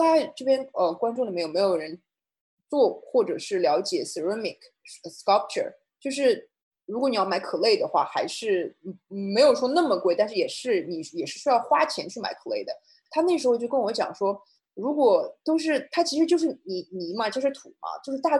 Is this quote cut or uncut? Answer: uncut